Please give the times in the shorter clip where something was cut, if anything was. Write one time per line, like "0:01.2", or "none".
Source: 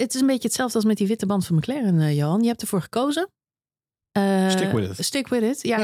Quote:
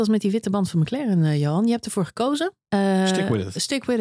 0:02.6